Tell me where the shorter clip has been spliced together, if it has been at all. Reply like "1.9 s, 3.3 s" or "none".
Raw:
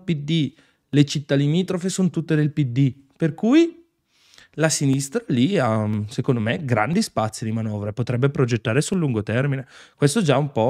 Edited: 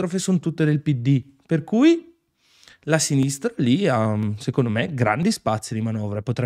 none